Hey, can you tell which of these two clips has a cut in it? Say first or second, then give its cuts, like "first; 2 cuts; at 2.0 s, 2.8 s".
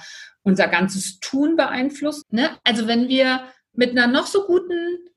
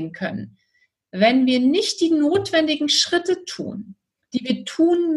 first; 1 cut; at 2.2 s